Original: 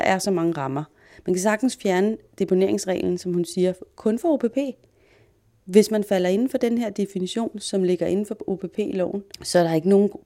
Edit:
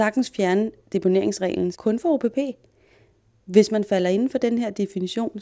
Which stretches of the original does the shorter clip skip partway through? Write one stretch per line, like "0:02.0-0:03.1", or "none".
0:03.2-0:03.9

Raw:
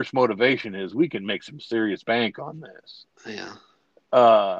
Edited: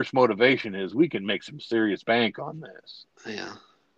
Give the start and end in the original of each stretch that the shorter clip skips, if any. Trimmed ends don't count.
none

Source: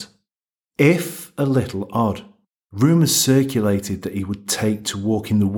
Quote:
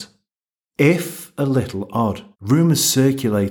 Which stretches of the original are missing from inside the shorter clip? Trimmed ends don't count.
0:02.3-0:02.6

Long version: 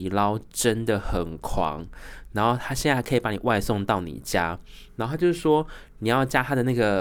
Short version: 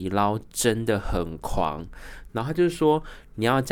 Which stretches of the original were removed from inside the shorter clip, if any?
0:02.3-0:04.9

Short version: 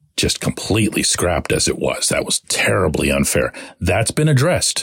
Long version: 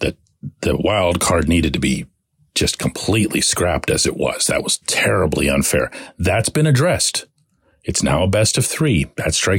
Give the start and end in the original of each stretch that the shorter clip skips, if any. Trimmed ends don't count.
none

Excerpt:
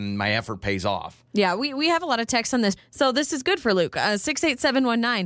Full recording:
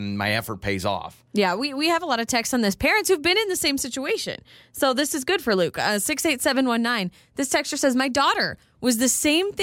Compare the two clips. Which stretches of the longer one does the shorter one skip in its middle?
0:02.8-0:04.6

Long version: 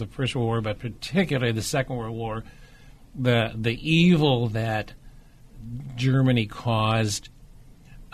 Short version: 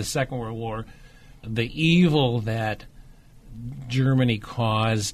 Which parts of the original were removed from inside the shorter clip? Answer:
0:03.0-0:03.5

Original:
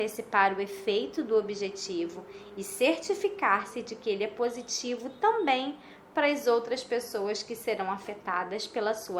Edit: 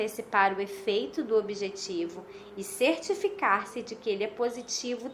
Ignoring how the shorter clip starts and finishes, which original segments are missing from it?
none

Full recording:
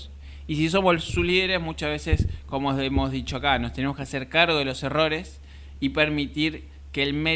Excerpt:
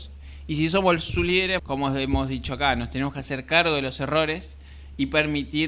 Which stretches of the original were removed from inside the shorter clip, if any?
0:01.6-0:02.4

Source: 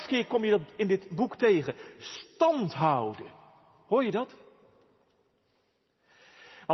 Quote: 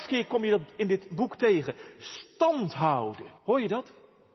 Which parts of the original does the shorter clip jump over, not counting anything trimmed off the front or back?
0:03.4-0:03.8

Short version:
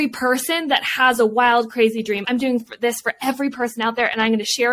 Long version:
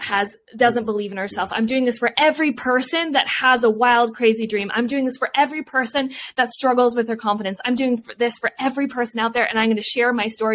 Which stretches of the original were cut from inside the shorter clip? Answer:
0:04.7-0:07.6

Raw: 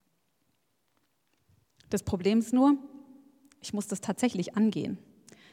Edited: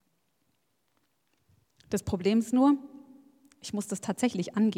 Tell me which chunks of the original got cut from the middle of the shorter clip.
none

